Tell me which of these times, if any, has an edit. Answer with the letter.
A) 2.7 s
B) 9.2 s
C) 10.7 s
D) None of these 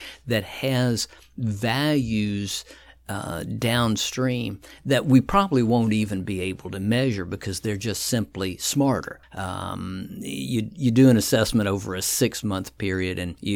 B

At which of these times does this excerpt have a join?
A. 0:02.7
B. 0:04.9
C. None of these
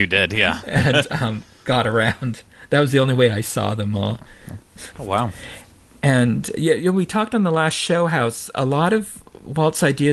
B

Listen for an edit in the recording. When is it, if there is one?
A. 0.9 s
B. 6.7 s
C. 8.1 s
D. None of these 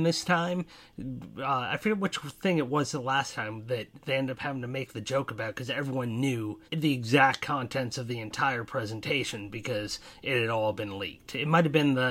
B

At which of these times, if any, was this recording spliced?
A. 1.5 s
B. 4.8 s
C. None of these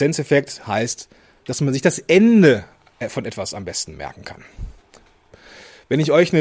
A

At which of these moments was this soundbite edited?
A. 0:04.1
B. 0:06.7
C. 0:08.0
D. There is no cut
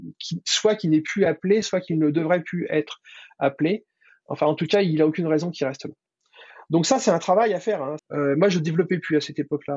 C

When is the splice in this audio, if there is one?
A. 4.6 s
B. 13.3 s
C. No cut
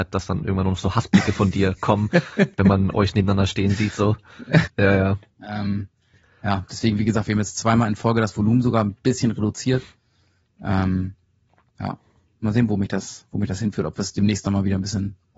A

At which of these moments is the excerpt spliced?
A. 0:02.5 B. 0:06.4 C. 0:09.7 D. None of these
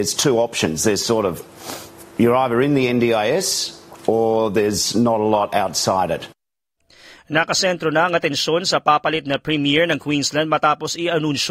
D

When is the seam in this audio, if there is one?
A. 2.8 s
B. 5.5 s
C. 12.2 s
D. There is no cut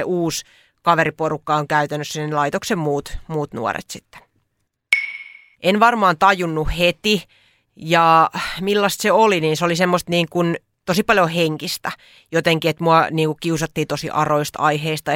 B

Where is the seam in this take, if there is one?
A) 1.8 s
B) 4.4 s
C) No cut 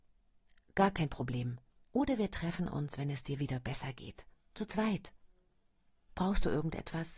A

